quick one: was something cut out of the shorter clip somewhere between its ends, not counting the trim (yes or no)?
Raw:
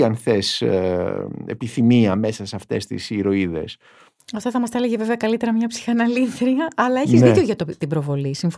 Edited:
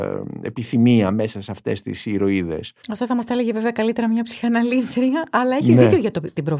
yes